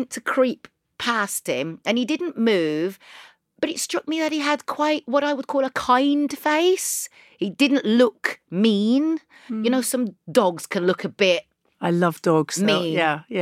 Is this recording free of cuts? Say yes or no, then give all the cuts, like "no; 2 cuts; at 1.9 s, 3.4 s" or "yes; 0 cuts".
yes; 0 cuts